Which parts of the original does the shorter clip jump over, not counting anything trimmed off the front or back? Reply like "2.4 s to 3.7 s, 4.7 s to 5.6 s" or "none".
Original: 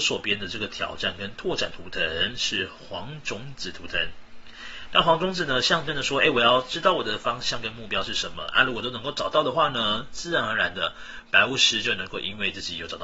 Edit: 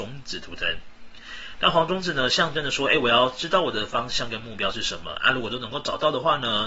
none